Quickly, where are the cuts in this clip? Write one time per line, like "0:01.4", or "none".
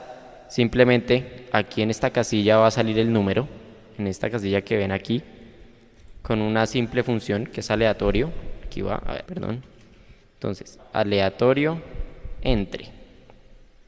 0:09.3
0:10.8